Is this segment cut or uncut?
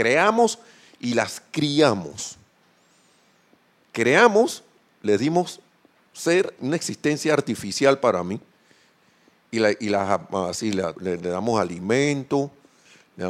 cut